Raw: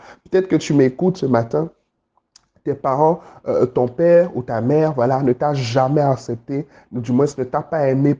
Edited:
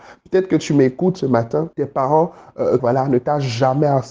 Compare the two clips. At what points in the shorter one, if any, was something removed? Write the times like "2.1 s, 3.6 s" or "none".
1.7 s, 2.8 s

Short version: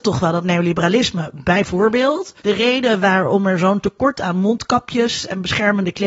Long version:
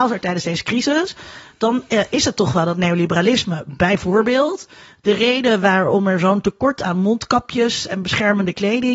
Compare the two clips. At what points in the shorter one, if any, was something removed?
2.4 s

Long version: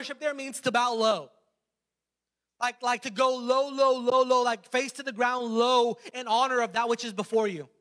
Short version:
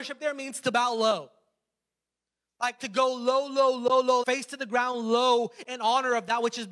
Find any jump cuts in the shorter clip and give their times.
2.8 s, 4.2 s

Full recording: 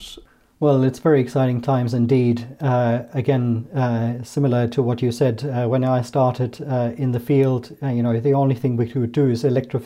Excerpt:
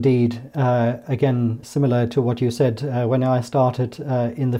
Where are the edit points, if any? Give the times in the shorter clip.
1.6 s

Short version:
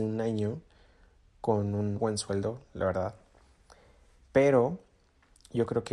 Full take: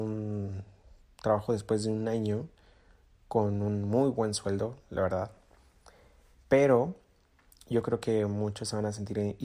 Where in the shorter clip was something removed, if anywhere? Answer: 1.9 s

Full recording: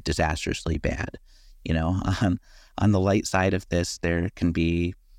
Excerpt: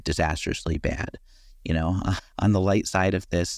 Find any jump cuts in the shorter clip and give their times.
2.2 s

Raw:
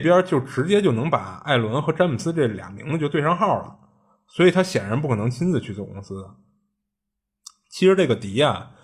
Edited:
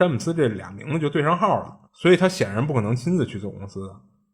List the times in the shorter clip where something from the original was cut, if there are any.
1.9 s

